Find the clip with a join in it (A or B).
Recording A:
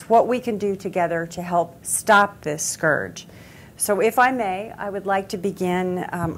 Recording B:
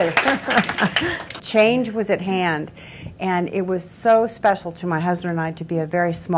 B